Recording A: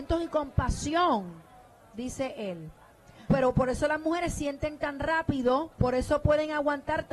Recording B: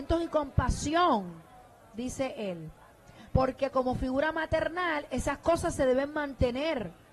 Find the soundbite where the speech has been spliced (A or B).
A